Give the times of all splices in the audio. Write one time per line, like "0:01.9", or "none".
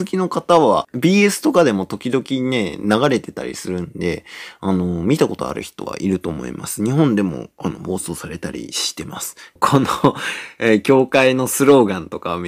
none